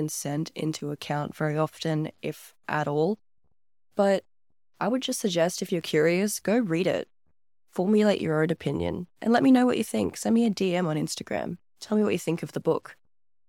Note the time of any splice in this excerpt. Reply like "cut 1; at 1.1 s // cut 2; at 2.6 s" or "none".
none